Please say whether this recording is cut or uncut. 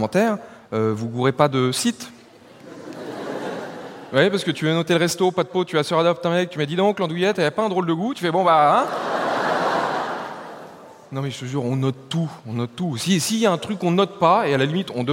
uncut